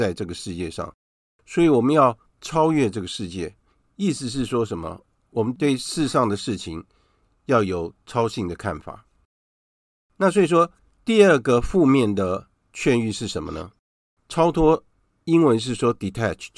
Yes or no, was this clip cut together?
yes